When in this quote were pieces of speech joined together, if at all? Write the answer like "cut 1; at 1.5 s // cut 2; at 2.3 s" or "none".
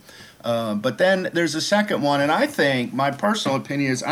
none